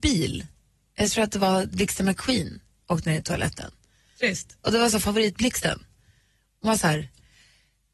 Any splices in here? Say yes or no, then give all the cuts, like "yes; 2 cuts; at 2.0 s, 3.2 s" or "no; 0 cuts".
yes; 1 cut; at 1.7 s